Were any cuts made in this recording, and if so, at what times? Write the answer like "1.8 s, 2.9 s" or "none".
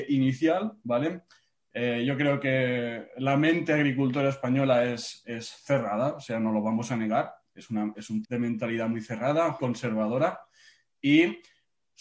8.2 s, 9.6 s